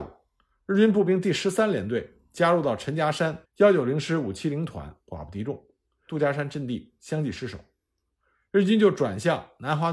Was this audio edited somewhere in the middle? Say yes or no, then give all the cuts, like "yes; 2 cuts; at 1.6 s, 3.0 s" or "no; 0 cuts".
yes; 2 cuts; at 3.4 s, 6.1 s